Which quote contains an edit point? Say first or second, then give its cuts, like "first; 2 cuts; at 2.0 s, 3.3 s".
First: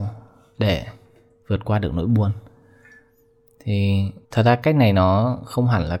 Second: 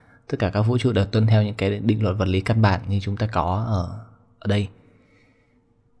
first; 1 cut; at 4.2 s